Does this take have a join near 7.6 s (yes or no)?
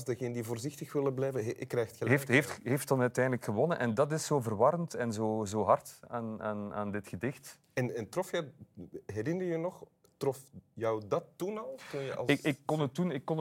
yes